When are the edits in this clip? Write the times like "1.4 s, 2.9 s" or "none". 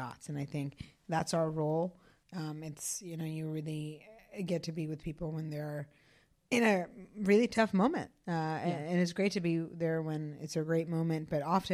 2.2 s